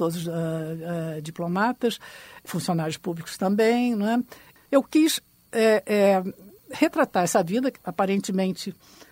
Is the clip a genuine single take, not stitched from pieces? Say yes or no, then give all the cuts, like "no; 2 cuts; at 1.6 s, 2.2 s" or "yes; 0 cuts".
yes; 0 cuts